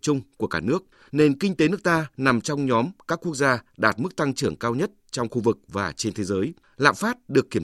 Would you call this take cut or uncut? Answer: cut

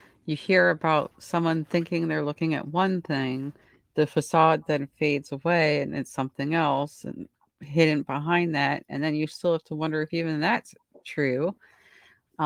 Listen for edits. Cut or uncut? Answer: uncut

